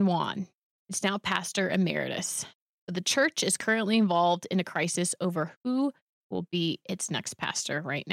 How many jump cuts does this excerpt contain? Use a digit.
0